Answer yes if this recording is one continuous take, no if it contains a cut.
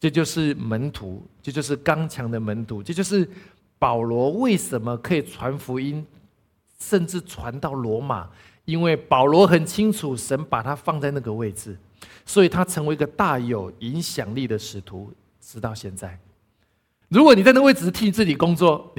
no